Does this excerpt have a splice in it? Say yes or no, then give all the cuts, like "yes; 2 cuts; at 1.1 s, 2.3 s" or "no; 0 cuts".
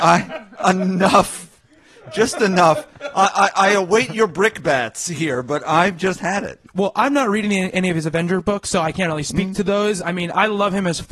no; 0 cuts